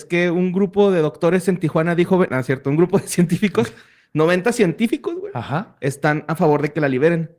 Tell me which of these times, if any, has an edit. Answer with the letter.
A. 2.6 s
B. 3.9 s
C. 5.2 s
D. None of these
D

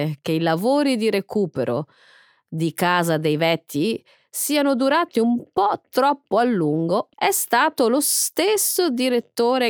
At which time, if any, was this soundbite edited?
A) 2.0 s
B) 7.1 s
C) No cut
B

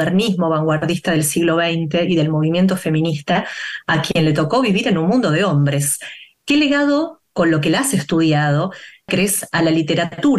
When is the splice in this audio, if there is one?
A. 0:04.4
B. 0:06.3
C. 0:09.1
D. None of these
C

